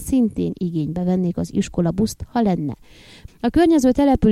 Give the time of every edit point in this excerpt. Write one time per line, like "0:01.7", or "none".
0:03.3